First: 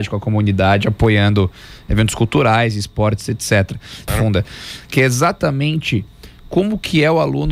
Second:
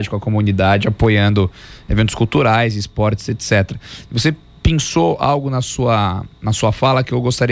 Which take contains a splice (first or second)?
first